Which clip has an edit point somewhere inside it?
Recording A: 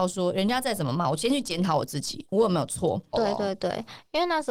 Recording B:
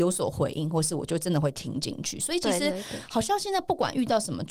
A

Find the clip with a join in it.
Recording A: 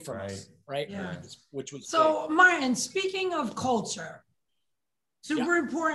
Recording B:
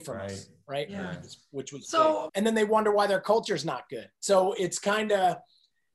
B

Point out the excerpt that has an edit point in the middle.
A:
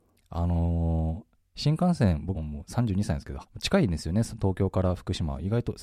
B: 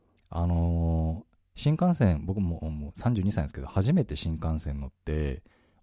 A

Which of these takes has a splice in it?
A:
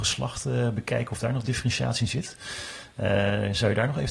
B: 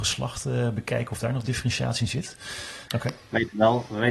B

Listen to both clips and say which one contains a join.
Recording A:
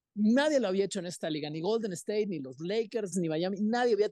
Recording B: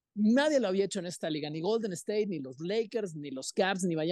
A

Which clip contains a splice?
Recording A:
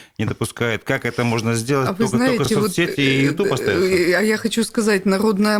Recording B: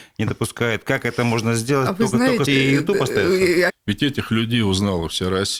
B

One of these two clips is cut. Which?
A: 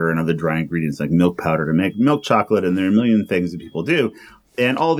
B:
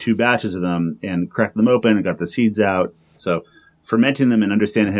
B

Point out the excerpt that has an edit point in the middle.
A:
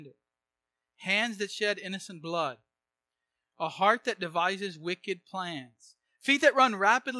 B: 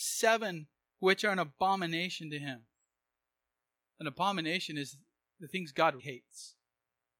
B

